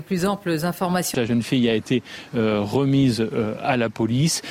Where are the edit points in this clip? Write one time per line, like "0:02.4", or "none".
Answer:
0:01.1